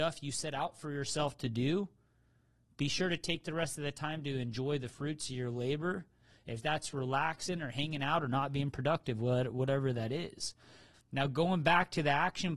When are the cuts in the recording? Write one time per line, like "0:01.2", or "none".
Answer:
0:10.9